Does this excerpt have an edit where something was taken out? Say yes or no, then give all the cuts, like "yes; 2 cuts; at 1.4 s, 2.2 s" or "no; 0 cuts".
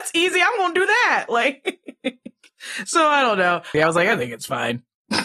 yes; 1 cut; at 3.7 s